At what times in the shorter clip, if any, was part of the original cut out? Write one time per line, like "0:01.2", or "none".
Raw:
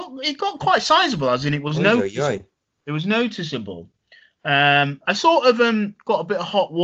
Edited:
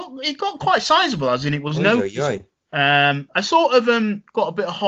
0:02.6